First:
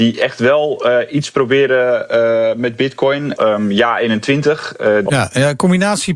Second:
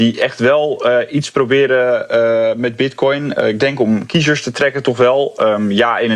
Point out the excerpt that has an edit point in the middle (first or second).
first